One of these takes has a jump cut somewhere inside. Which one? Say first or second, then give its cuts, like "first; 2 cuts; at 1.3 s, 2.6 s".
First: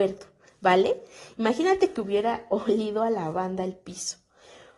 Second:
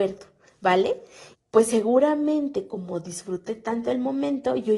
second; 1 cut; at 1.3 s